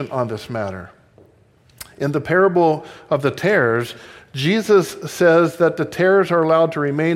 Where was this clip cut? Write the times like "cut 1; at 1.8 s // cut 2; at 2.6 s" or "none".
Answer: none